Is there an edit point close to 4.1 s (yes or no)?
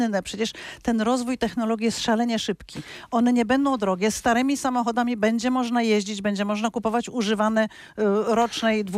no